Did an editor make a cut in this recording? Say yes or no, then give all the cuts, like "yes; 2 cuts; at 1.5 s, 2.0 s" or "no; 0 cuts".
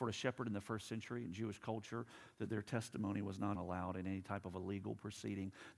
yes; 1 cut; at 3.5 s